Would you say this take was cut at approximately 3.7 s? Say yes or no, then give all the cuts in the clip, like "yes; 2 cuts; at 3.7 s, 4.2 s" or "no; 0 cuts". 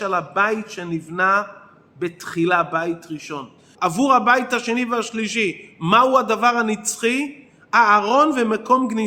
yes; 1 cut; at 3.7 s